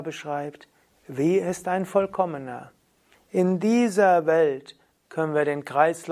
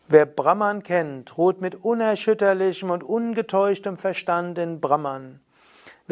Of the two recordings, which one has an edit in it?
first; 1 cut; at 3.1 s

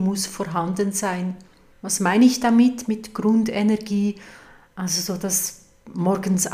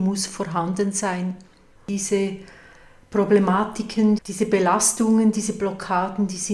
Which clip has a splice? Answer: second; 2 cuts; at 1.8 s, 4.2 s

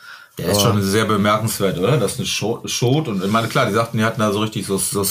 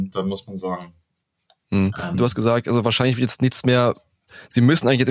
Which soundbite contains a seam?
second; 1 cut; at 2.1 s

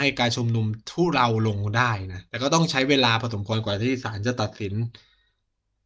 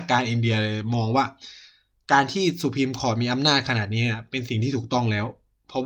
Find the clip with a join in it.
first; 1 cut; at 2.3 s

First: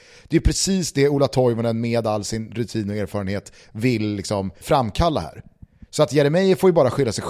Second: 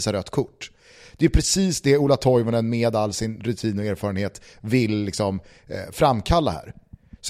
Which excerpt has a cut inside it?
first; 1 cut; at 4.6 s

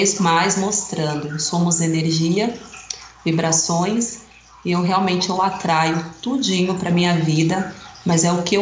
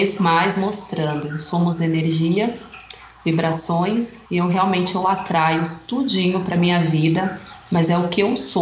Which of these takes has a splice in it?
second; 1 cut; at 4.3 s

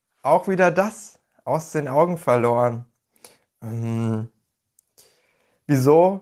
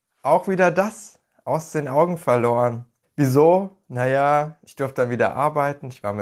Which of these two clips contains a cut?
second; 1 cut; at 3.0 s

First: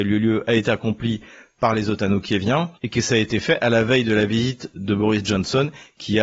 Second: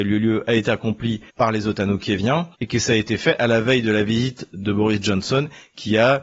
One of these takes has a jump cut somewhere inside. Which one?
second; 1 cut; at 1.3 s

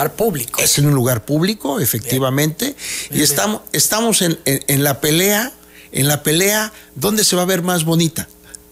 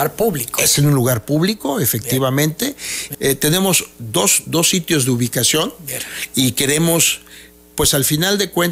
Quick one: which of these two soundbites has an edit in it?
second; 1 cut; at 3.1 s

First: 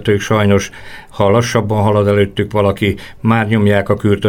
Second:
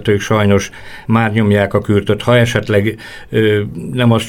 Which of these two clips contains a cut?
second; 1 cut; at 1.0 s

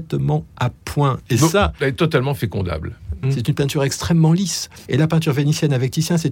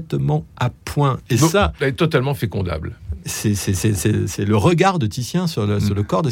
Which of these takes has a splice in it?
first; 2 cuts; at 3.2 s, 4.9 s

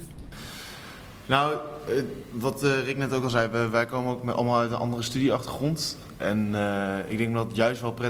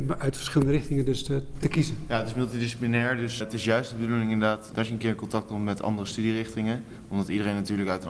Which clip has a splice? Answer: second; 2 cuts; at 3.4 s, 4.7 s

